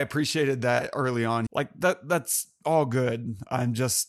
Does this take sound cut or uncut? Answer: cut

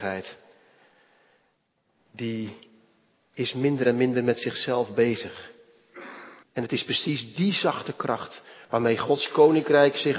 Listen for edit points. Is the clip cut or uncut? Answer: cut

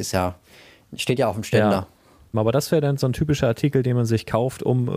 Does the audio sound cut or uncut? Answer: cut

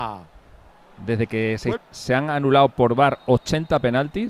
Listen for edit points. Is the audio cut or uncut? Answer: cut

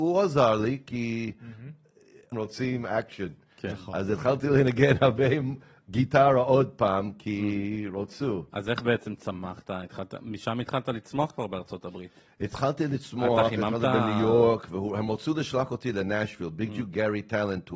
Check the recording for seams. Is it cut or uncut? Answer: cut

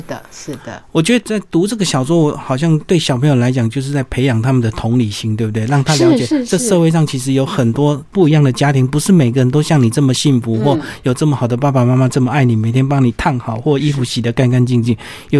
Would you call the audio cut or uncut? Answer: uncut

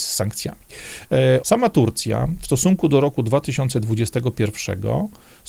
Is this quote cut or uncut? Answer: cut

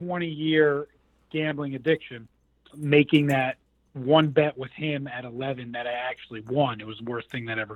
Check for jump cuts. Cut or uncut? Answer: cut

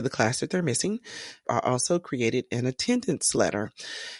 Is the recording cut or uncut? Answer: cut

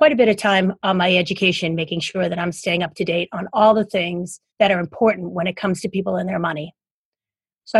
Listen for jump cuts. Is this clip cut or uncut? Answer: cut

